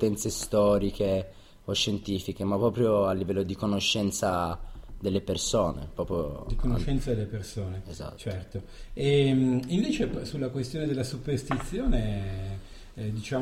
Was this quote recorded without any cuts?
yes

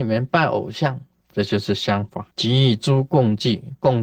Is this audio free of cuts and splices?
no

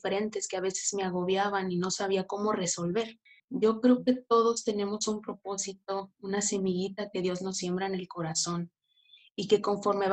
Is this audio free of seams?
no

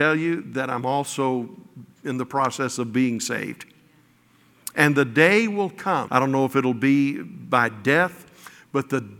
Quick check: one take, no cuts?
no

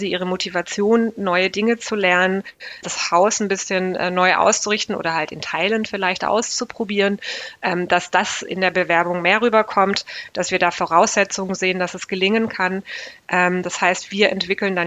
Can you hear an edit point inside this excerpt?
yes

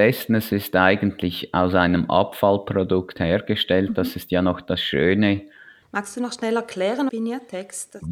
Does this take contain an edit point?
yes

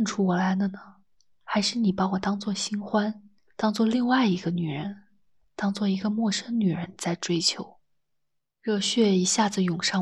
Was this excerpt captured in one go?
yes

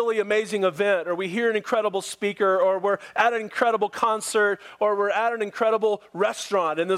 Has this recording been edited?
no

